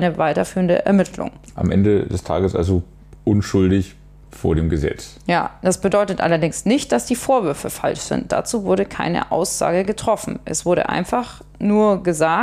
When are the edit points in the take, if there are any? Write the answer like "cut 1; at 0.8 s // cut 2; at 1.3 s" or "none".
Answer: none